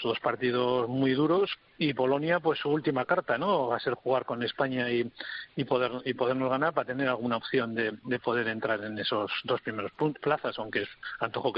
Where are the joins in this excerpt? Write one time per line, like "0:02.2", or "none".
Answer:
none